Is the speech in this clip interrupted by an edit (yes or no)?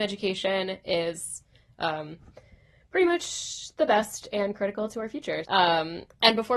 yes